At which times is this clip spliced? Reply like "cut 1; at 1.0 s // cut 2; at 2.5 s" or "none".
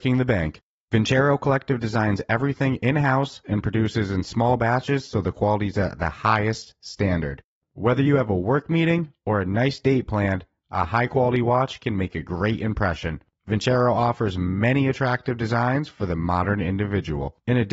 cut 1; at 3.4 s